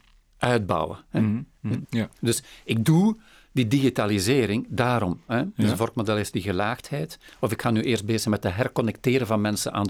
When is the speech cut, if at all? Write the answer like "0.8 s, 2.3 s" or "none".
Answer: 1.8 s, 5.3 s, 7.3 s